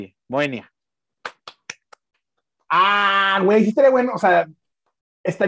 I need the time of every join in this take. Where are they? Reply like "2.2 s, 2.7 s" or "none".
none